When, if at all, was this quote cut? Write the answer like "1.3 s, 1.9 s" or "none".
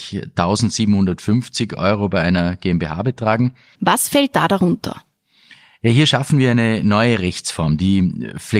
3.7 s